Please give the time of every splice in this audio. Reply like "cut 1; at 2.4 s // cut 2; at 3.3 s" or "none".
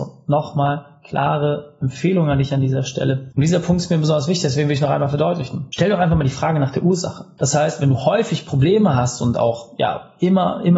cut 1; at 3.3 s